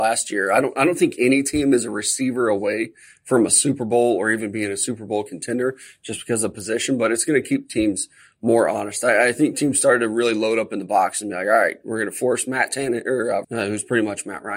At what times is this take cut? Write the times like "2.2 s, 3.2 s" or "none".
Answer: 13.4 s